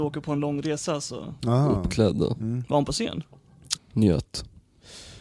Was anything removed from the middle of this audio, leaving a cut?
yes; 2 cuts; at 1.4 s, 3.8 s

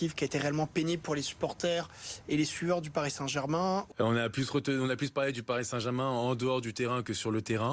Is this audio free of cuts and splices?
no; 1 cut; at 3.9 s

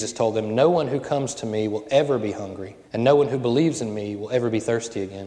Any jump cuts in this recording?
yes; 1 cut; at 2.8 s

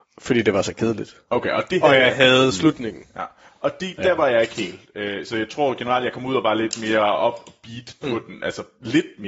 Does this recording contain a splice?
no; 0 cuts

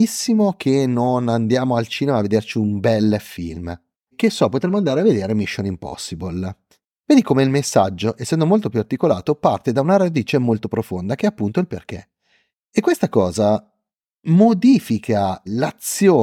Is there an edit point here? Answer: yes; 1 cut; at 4.1 s

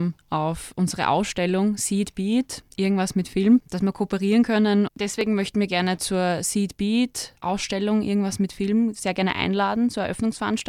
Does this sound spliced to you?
yes; 1 cut; at 4.9 s

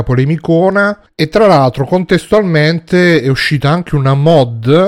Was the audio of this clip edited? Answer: no; 0 cuts

